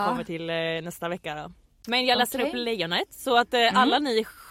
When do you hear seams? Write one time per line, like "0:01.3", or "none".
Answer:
none

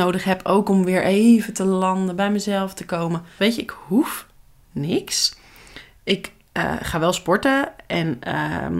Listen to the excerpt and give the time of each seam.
0:03.4

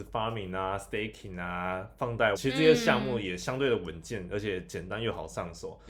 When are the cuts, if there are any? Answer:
0:02.4

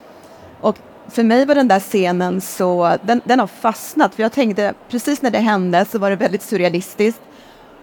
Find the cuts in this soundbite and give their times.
none

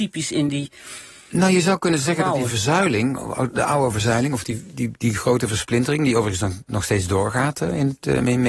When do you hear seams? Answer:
none

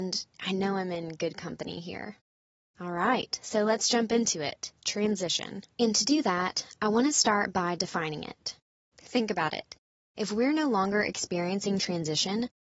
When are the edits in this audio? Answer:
0:05.7
0:08.8

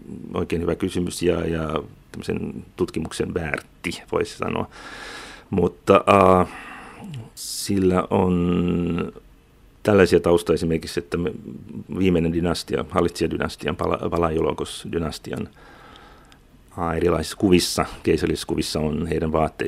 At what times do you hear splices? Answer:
none

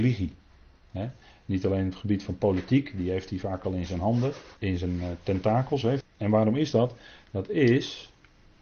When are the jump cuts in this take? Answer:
0:04.6
0:06.0

